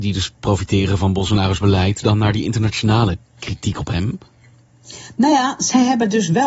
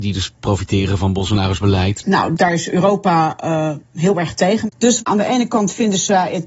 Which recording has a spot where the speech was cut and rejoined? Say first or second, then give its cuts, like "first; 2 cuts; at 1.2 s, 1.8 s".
second; 2 cuts; at 2.0 s, 4.7 s